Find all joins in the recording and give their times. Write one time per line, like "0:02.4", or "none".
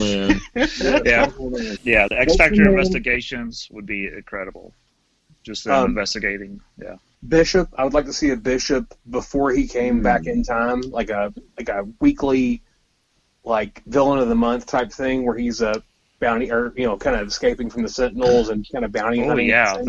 0:01.8